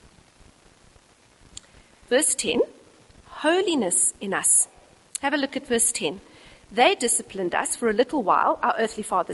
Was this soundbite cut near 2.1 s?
yes; 1 cut; at 2.1 s

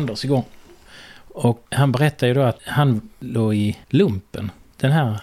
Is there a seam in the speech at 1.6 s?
yes; 1 cut; at 1.6 s

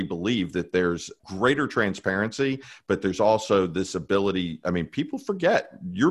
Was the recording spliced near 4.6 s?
no; 0 cuts

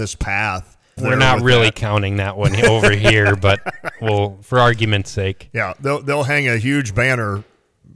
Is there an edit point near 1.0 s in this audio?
yes; 1 cut; at 1.0 s

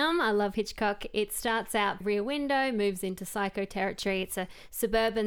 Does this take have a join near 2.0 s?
yes; 1 cut; at 2.0 s

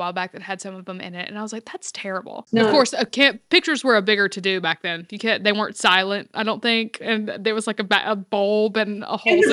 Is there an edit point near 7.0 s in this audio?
no; 1 cut; at 2.5 s

